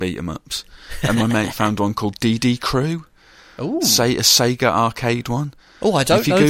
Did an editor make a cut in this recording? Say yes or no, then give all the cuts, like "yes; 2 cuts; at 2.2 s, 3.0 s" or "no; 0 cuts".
no; 0 cuts